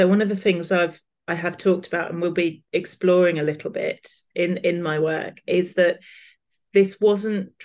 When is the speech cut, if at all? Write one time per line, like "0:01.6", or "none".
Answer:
0:02.7

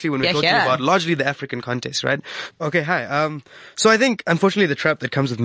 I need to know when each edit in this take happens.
0:02.5

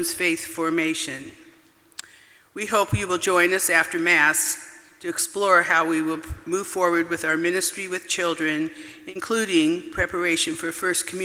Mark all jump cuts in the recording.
none

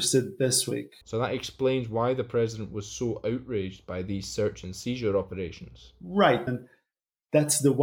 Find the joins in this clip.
0:01.0
0:06.5

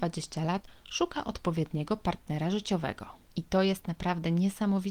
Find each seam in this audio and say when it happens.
0:03.3

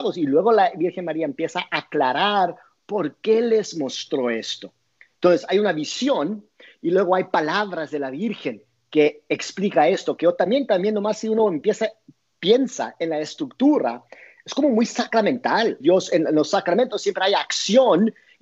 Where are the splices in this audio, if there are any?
0:15.8

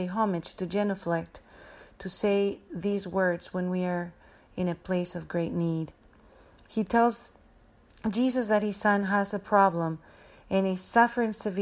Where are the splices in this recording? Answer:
none

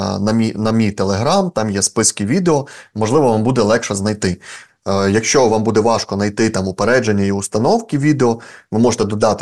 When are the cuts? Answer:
0:04.7

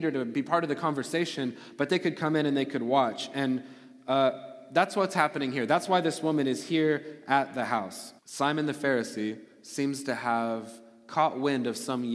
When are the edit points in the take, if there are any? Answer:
0:08.2

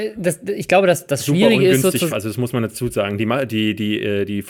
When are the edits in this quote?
0:02.1

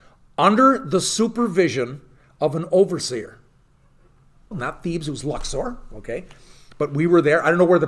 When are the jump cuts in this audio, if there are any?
0:04.5

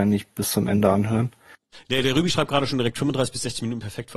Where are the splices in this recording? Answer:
0:01.7

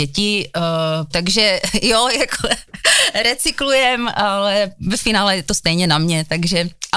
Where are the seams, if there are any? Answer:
0:01.1

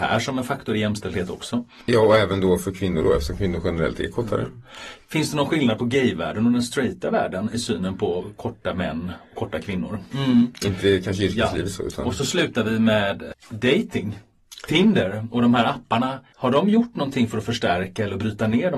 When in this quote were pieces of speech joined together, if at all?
0:10.1

